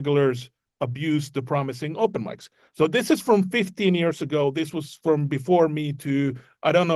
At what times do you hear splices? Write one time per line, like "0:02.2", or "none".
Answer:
none